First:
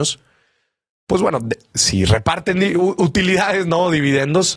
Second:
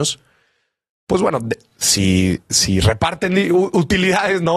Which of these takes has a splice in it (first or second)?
first